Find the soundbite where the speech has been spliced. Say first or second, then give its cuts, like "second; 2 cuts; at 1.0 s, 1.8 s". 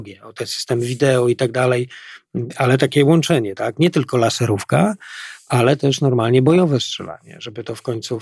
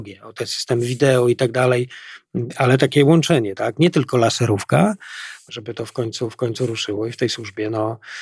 second; 1 cut; at 5.5 s